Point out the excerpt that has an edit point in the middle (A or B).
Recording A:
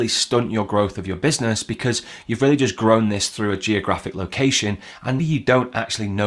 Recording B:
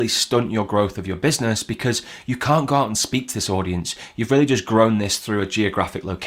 A